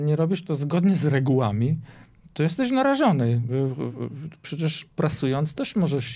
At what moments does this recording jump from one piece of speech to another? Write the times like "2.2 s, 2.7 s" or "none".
none